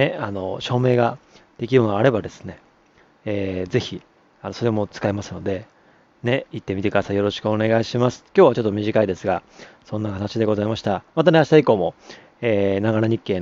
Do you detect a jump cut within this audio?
no; 0 cuts

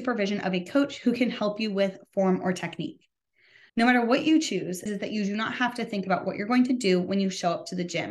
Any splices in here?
yes; 1 cut; at 4.9 s

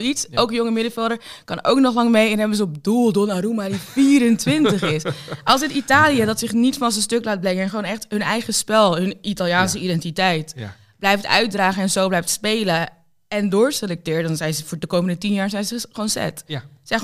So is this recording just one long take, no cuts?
yes; 0 cuts

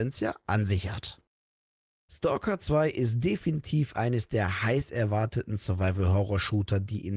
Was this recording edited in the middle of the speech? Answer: no; 0 cuts

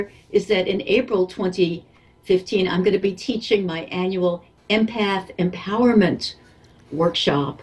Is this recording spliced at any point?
no; 0 cuts

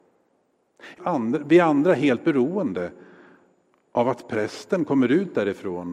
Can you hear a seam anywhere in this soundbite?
yes; 1 cut; at 1.0 s

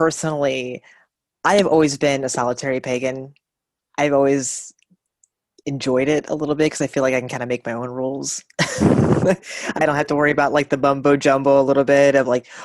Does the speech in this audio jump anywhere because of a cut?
yes; 1 cut; at 3.8 s

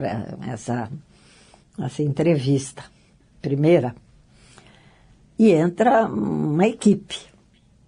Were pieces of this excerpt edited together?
no; 0 cuts

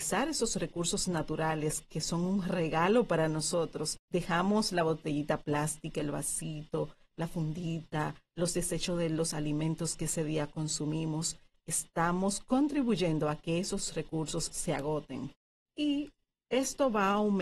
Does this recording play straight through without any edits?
yes; 0 cuts

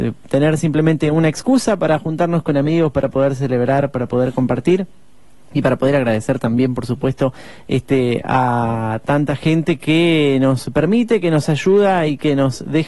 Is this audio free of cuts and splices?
yes; 0 cuts

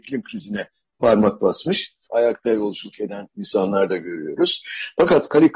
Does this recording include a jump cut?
yes; 1 cut; at 2.1 s

